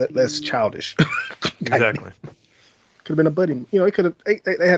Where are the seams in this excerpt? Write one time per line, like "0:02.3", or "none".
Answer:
none